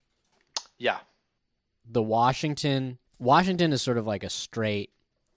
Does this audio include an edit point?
yes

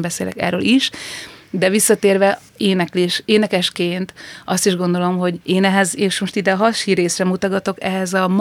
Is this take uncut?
no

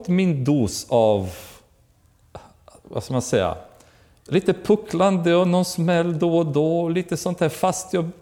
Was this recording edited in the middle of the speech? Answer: no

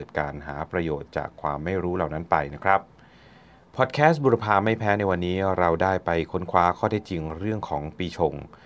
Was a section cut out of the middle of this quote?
no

